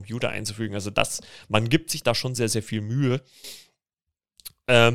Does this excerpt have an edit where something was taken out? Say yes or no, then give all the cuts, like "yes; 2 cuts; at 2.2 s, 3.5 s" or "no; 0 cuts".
no; 0 cuts